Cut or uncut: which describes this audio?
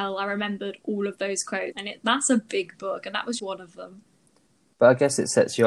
cut